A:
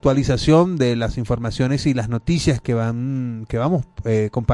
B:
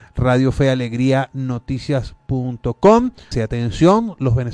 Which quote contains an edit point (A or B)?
B